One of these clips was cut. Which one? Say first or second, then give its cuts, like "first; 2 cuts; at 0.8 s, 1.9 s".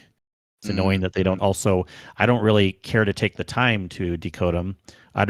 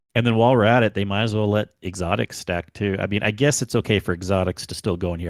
first; 1 cut; at 1.4 s